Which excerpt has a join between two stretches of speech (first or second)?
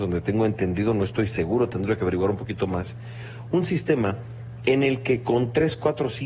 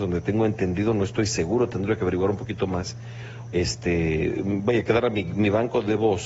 second